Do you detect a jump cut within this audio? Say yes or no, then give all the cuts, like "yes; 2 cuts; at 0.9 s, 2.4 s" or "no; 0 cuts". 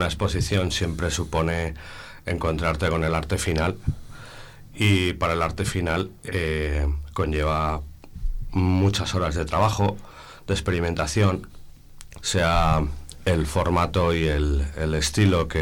yes; 1 cut; at 12.2 s